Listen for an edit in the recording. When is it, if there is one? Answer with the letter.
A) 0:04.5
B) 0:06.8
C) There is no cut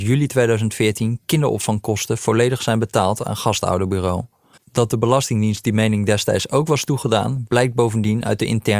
A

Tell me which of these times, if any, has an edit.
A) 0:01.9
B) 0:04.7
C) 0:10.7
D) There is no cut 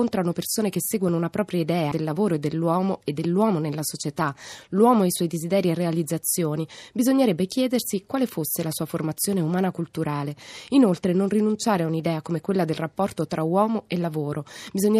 A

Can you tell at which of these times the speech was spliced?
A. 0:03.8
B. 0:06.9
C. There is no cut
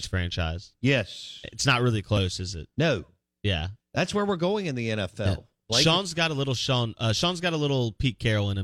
A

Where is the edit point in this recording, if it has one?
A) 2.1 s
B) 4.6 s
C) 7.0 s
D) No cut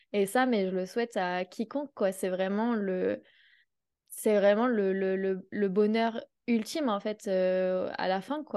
D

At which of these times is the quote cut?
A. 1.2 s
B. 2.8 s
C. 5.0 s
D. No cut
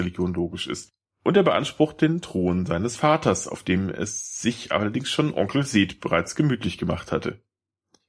D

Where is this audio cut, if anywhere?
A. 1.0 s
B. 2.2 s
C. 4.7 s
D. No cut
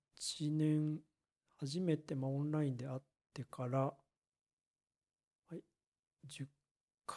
D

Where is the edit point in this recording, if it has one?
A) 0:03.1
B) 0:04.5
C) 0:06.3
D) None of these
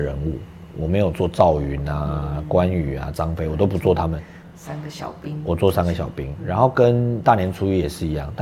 D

